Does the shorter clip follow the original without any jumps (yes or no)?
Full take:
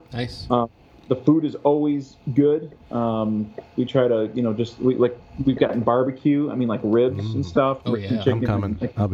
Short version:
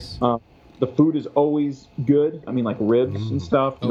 no